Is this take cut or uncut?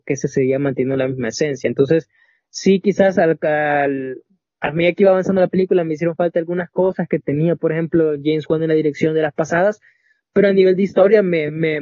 uncut